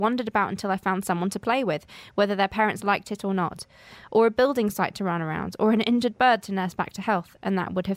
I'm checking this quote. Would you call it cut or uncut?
uncut